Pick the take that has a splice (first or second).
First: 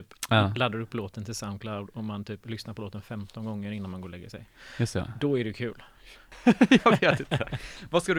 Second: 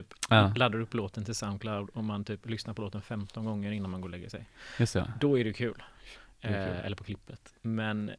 first